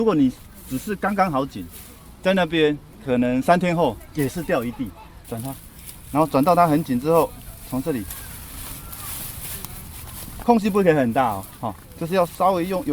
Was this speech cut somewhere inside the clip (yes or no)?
yes